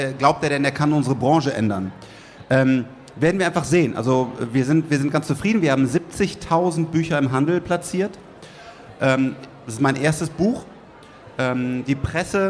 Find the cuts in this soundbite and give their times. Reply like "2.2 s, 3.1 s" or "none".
none